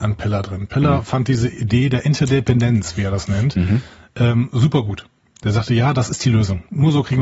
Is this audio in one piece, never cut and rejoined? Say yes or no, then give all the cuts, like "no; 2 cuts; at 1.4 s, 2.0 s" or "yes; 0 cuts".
yes; 0 cuts